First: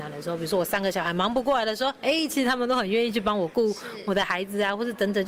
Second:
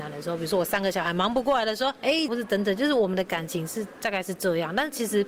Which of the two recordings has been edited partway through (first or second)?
second